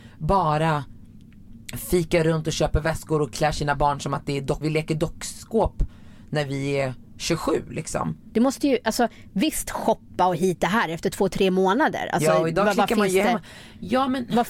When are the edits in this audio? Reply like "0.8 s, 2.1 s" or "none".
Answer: 4.6 s, 8.3 s